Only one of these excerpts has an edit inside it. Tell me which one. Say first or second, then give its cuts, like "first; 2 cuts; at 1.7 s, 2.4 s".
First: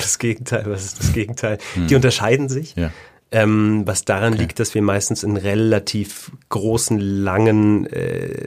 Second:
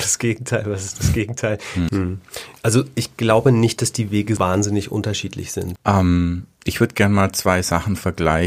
second; 3 cuts; at 1.9 s, 4.4 s, 5.8 s